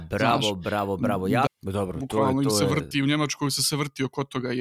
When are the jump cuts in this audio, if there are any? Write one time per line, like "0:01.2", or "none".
0:01.5

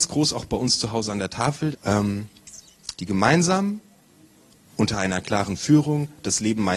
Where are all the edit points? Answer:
0:01.7
0:02.9

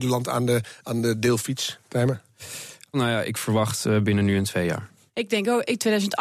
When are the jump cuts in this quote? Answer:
0:02.9
0:05.1

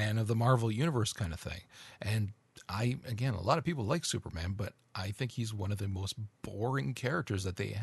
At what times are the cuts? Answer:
none

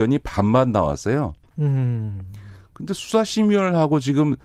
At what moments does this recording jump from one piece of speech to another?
none

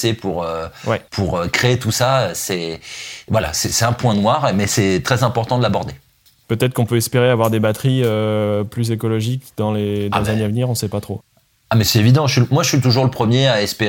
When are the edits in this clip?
none

